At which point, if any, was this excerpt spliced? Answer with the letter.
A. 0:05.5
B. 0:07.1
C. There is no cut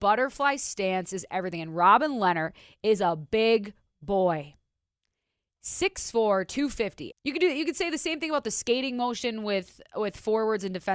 B